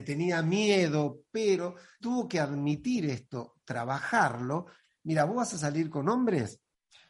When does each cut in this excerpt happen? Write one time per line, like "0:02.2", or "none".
0:02.0
0:04.9